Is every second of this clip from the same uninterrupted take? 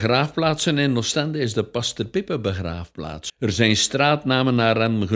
no; 1 cut; at 3.3 s

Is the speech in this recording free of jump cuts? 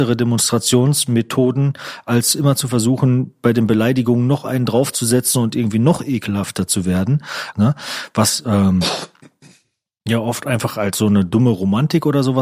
no; 1 cut; at 7.5 s

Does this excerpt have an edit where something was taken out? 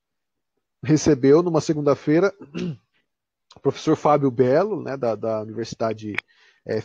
no; 0 cuts

